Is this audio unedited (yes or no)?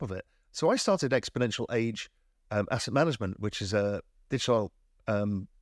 yes